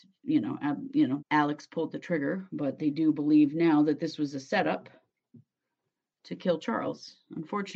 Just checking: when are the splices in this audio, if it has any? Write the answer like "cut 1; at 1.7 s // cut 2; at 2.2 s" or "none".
cut 1; at 1.2 s

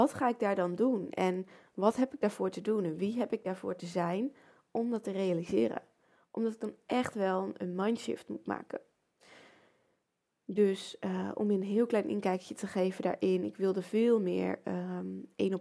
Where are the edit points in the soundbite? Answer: none

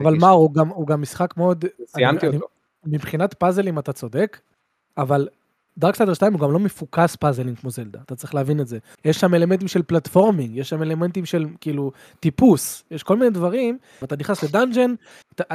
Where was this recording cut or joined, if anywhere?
cut 1; at 8.9 s // cut 2; at 14.0 s

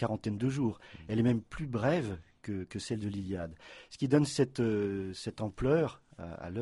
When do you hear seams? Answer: none

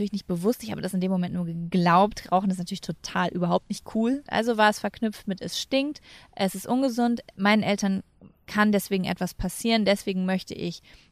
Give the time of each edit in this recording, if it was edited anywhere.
cut 1; at 4.3 s

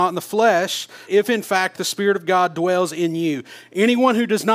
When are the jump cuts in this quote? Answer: cut 1; at 1.1 s

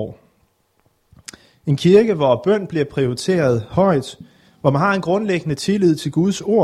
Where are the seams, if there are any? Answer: cut 1; at 1.5 s

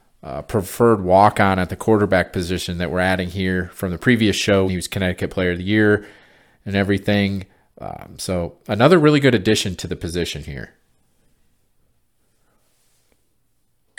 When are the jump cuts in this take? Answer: cut 1; at 4.7 s

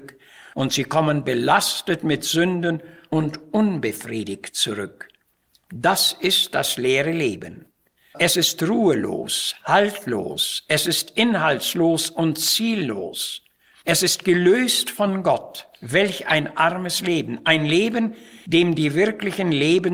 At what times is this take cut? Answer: none

